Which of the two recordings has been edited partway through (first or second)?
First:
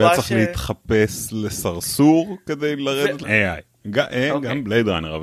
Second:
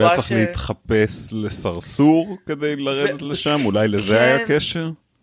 first